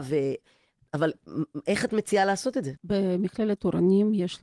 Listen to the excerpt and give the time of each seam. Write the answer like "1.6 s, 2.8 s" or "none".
2.8 s